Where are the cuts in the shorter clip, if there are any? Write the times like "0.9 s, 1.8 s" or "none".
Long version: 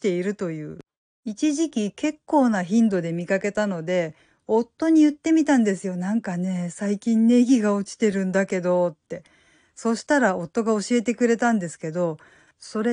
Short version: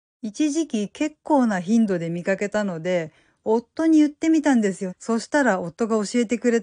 4.9 s